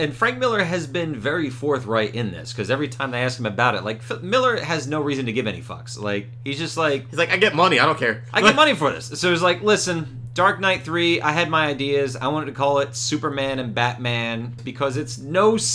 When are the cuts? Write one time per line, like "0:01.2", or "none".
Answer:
0:14.6